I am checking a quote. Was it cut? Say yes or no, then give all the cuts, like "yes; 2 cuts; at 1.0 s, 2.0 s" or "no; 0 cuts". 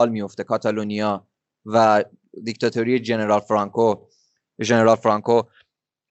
no; 0 cuts